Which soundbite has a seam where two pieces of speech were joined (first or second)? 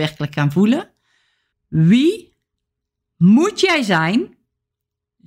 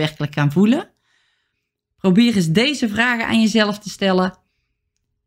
first